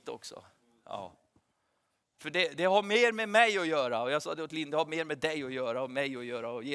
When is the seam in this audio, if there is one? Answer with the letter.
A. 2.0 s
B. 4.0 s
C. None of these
A